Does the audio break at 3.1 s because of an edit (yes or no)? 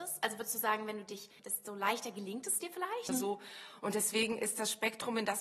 yes